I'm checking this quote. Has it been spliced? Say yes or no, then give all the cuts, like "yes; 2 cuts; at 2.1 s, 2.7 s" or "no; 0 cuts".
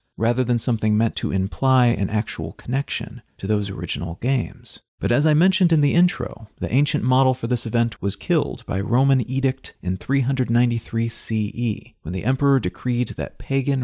yes; 1 cut; at 4.9 s